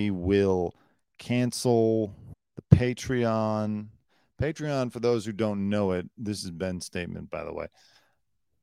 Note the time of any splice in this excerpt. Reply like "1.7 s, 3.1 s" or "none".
none